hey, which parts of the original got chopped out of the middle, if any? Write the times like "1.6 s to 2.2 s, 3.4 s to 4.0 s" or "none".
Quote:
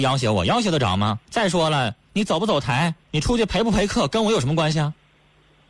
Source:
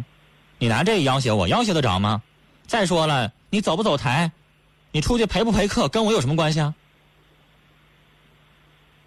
2.3 s to 2.6 s, 4.4 s to 4.8 s